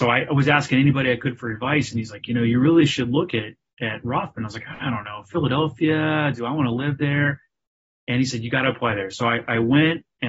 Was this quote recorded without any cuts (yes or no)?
yes